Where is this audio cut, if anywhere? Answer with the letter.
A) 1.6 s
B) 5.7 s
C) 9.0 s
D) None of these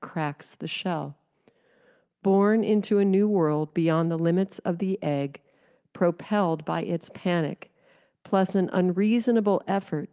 D